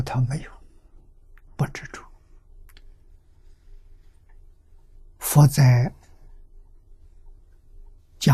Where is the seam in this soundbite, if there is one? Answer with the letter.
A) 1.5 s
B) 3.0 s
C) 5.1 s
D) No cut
A